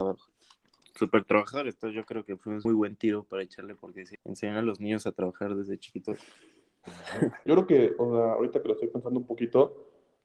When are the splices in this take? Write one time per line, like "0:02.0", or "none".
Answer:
0:02.7
0:04.2
0:07.5